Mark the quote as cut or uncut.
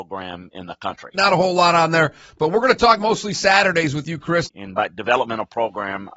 cut